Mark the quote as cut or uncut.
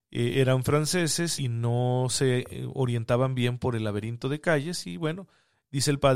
cut